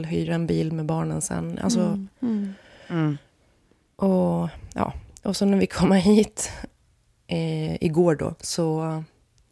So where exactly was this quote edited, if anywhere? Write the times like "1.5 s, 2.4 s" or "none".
none